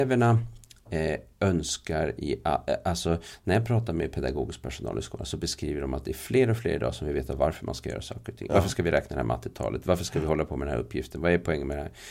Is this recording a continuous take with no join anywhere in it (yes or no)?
yes